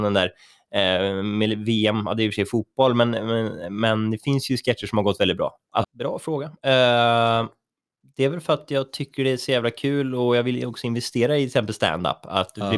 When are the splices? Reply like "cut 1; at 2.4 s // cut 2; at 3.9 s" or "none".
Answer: cut 1; at 5.8 s

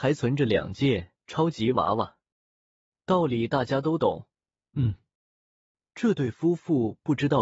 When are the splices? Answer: cut 1; at 4.6 s

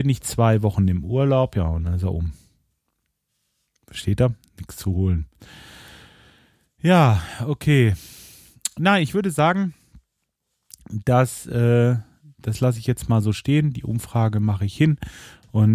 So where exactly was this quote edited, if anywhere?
none

